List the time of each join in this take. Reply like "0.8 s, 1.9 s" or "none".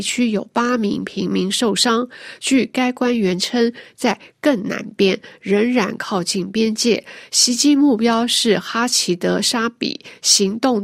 3.9 s